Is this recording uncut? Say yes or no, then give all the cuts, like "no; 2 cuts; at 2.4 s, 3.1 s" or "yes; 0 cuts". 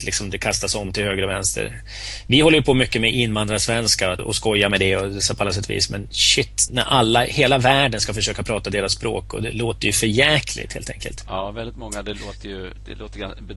no; 2 cuts; at 4.2 s, 6.7 s